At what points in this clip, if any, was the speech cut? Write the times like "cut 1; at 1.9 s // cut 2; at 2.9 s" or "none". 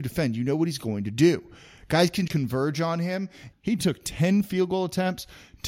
cut 1; at 2.3 s // cut 2; at 3.5 s